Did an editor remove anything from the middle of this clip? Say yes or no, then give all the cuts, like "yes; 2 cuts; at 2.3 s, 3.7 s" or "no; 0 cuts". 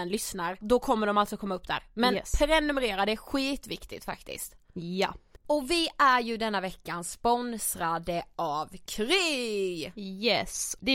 no; 0 cuts